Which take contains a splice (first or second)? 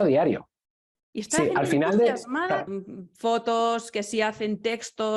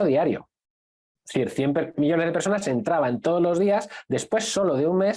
first